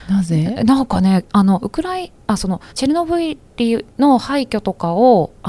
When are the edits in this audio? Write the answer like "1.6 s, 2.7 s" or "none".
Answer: 2.7 s